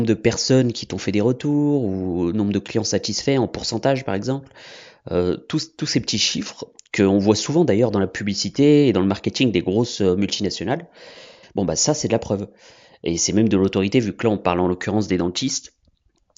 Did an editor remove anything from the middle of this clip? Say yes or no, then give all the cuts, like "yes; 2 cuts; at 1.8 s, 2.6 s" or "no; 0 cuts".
yes; 1 cut; at 11.4 s